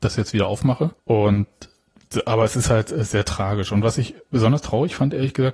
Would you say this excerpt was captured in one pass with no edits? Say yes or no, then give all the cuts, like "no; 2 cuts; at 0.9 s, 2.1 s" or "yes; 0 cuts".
no; 1 cut; at 1.0 s